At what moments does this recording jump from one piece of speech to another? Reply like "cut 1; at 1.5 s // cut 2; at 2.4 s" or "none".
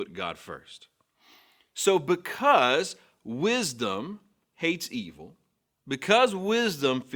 none